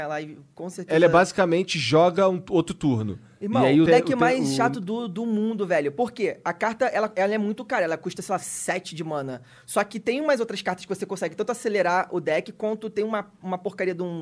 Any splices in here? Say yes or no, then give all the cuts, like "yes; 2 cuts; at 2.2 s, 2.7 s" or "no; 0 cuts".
yes; 1 cut; at 3.9 s